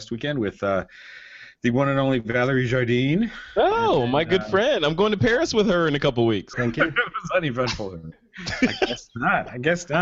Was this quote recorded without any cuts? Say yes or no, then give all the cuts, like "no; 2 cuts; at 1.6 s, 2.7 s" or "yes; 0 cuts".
no; 2 cuts; at 6.5 s, 8.1 s